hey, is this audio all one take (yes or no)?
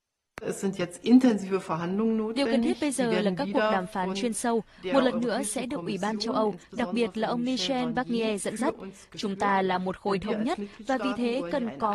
yes